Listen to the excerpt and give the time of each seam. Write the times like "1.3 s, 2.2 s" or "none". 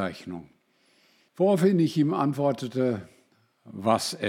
1.3 s

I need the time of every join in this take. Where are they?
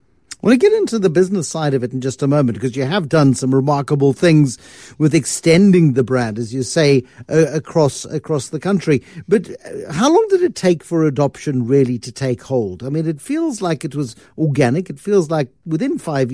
none

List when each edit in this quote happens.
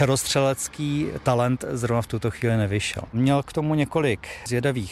3.1 s

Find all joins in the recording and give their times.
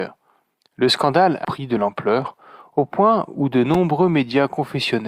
1.4 s

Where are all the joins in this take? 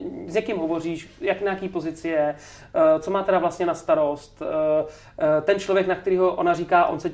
none

